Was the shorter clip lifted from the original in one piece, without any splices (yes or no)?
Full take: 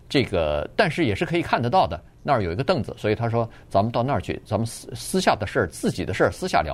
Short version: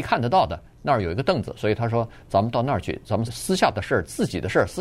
no